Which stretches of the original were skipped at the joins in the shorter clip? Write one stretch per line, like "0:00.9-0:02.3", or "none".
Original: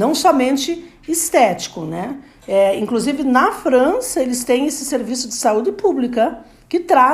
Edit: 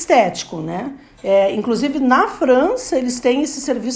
none